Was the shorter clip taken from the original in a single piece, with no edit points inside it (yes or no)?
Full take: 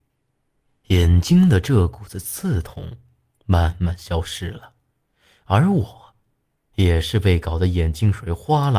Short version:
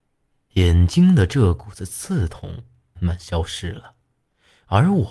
no